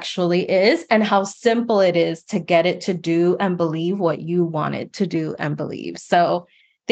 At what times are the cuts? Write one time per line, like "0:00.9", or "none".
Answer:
none